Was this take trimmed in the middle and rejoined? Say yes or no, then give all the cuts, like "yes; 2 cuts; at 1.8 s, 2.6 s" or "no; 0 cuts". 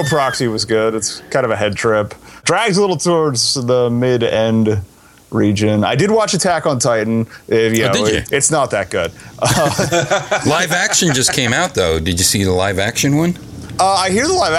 yes; 1 cut; at 8.2 s